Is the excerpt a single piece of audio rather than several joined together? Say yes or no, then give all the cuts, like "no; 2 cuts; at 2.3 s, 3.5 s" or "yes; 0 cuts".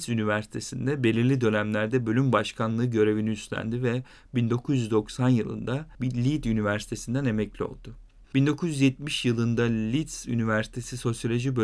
no; 1 cut; at 8.2 s